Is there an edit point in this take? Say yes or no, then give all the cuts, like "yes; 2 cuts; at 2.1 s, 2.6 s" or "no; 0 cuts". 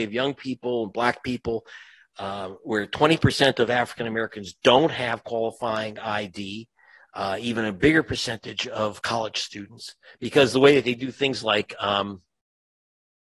no; 0 cuts